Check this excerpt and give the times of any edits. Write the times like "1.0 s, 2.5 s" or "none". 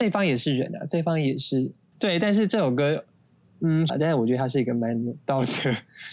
1.9 s, 3.9 s